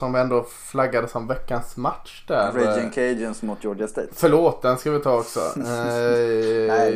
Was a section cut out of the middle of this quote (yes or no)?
no